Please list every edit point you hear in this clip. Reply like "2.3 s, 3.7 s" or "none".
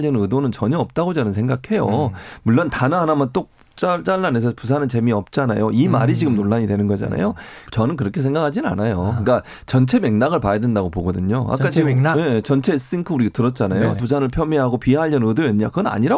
7.7 s, 14.0 s